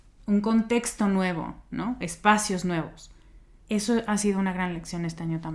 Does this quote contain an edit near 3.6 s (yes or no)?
yes